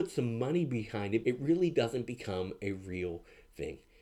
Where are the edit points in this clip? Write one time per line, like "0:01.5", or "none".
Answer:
0:01.2